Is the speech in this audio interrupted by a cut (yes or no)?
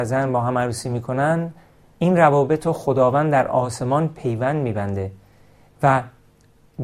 no